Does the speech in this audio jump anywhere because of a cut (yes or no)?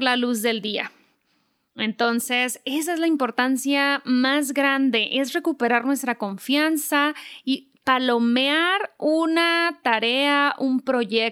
no